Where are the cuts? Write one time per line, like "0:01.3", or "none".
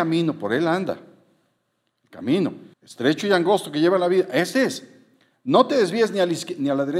0:02.7